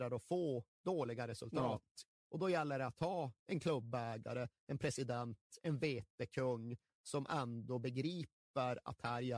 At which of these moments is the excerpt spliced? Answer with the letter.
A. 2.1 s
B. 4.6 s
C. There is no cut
A